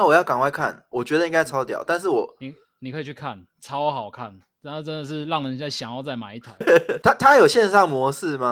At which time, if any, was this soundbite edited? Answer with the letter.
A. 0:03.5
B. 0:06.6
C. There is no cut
B